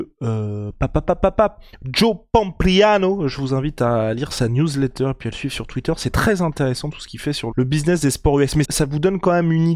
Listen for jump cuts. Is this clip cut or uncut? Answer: cut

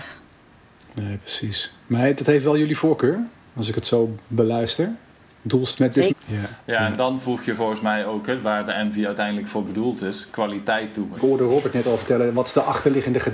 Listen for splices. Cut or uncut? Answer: cut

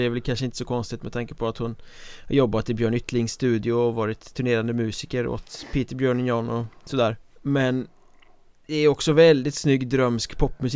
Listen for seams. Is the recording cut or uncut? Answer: cut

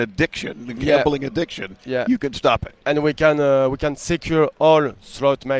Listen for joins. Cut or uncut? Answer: uncut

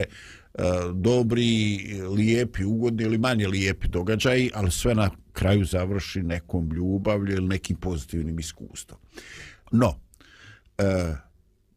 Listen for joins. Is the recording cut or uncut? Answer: cut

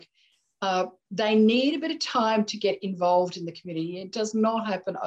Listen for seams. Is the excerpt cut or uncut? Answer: uncut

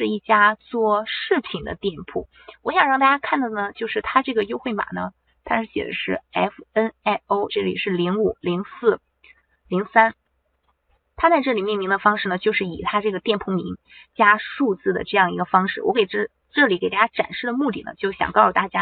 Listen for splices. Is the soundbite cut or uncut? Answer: cut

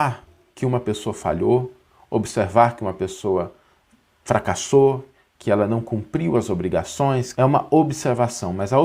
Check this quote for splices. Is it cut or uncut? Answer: cut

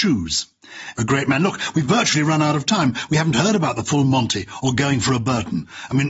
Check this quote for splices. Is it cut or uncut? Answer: uncut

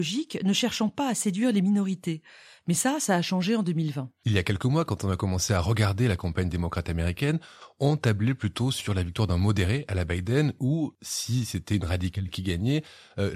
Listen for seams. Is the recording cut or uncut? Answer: uncut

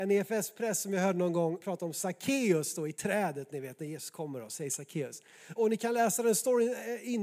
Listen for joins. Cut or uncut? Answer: cut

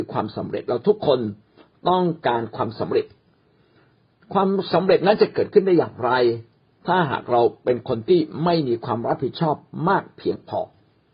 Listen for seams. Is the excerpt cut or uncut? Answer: uncut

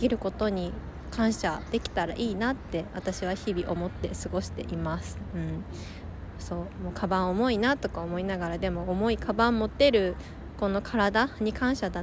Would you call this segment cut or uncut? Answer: uncut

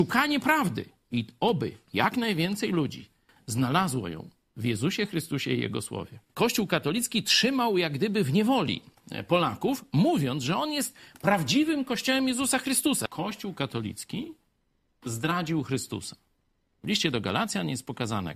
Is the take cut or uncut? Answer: uncut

